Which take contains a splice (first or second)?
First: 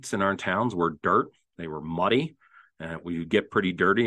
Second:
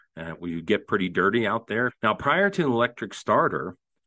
second